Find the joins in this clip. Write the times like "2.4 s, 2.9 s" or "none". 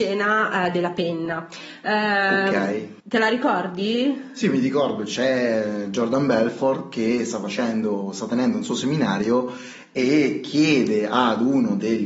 3.0 s